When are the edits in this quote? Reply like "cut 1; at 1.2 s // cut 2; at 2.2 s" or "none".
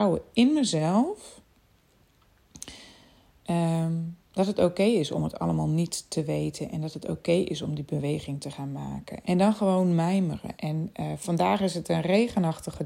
cut 1; at 9.2 s // cut 2; at 10.5 s